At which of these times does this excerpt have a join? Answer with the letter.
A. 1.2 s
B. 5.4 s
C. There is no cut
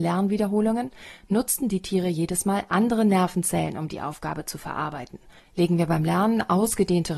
B